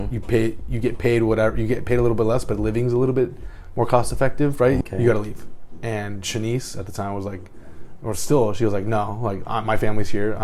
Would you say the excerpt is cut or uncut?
cut